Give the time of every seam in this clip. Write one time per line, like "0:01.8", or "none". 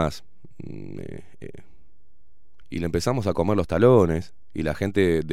0:02.6